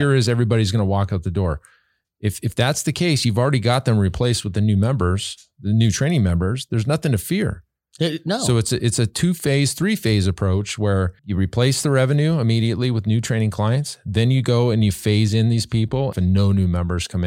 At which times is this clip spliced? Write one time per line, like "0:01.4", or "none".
0:11.2
0:16.1